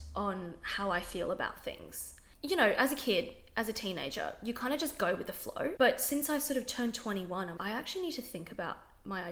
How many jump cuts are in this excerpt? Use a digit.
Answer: 2